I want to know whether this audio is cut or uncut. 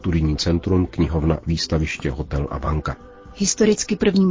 uncut